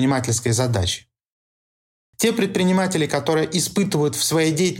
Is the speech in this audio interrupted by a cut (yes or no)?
no